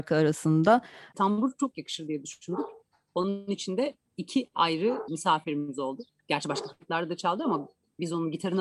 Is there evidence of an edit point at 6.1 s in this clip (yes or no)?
yes